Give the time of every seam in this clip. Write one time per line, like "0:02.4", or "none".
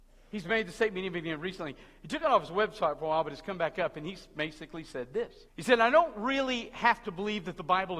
0:05.5